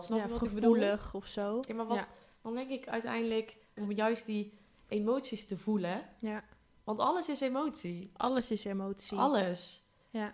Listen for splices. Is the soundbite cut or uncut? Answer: cut